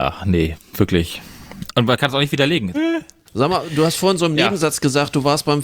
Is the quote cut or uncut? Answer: cut